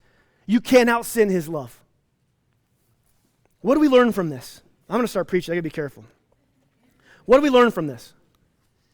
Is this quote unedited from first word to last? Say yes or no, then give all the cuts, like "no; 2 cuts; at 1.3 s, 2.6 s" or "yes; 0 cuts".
yes; 0 cuts